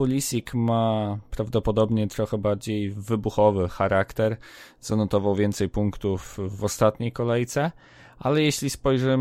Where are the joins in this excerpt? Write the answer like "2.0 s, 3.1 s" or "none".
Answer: none